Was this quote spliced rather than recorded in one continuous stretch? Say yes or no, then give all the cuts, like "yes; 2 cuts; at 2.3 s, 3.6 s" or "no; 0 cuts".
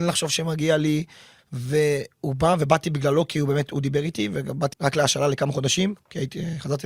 yes; 2 cuts; at 1.4 s, 4.7 s